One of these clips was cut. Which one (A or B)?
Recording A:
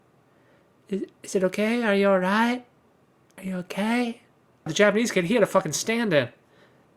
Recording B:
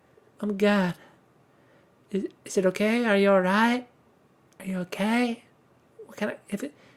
A